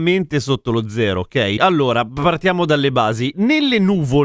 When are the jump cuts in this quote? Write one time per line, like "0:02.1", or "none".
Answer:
0:01.6